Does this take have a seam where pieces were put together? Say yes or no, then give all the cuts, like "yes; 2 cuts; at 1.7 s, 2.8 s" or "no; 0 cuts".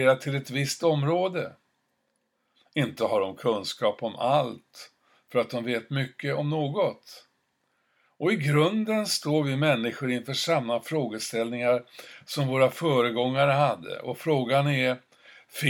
no; 0 cuts